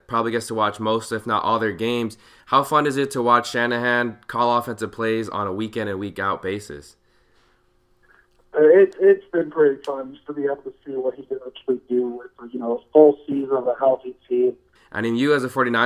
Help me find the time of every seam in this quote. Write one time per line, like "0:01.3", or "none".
0:14.8